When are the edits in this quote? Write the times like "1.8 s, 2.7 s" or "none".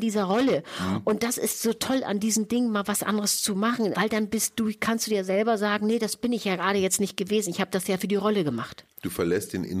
3.9 s